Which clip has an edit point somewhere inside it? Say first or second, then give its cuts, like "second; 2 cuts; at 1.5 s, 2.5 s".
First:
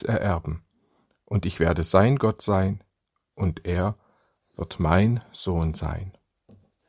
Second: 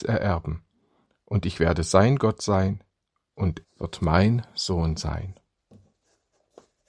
second; 1 cut; at 3.6 s